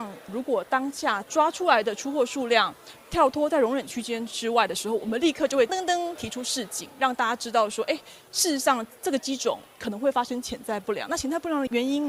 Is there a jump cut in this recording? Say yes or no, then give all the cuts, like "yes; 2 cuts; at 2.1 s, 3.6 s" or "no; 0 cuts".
yes; 1 cut; at 5.7 s